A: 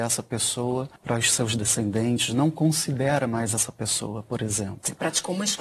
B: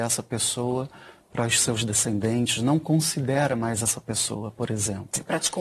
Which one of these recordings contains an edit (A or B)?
A